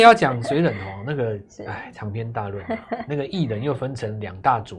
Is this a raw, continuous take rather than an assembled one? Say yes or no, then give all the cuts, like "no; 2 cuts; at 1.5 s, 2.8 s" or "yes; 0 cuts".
yes; 0 cuts